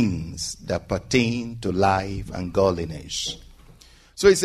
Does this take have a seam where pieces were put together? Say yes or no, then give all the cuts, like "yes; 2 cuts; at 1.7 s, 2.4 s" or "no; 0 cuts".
no; 0 cuts